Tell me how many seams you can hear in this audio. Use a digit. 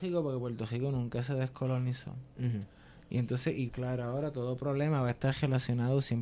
1